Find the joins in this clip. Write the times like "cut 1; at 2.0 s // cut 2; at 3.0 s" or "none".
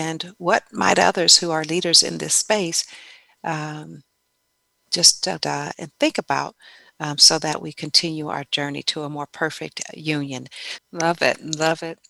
cut 1; at 5.4 s // cut 2; at 10.8 s